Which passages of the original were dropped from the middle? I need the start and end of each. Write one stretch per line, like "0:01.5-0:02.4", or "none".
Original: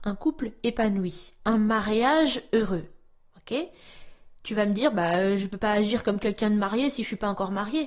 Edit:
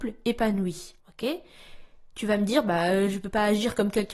0:01.4-0:03.3